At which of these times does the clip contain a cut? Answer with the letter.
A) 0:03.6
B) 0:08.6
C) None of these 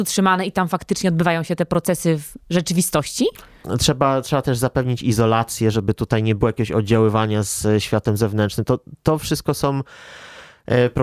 A